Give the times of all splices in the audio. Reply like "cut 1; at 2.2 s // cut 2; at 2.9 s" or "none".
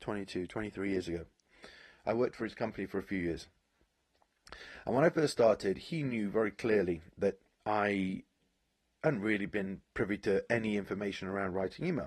cut 1; at 7.6 s // cut 2; at 9.9 s